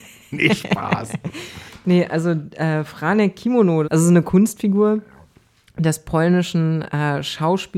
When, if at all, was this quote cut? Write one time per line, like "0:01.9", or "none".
0:03.8

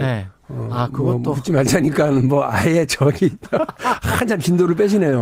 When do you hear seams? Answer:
0:03.7

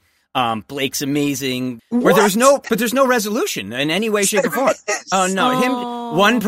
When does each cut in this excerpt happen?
0:01.8

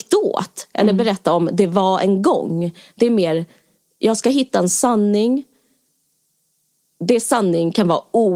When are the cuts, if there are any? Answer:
none

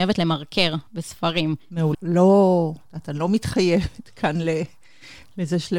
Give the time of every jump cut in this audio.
0:01.9

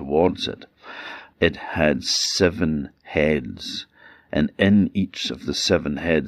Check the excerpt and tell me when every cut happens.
0:01.3

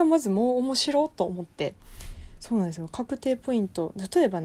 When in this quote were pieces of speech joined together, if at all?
none

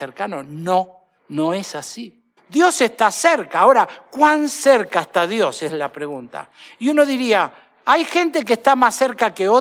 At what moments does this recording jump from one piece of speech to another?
0:02.4

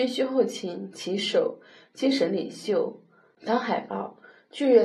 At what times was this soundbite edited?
0:03.4

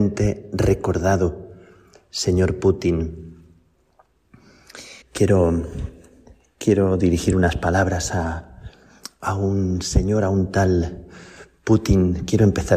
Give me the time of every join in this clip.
0:05.0

